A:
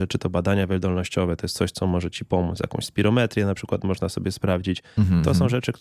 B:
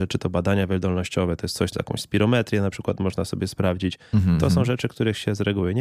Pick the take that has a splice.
B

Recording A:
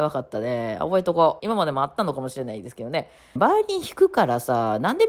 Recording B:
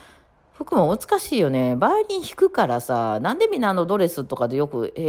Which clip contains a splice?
A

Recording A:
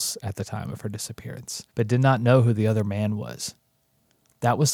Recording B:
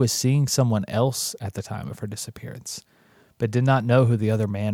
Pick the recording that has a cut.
A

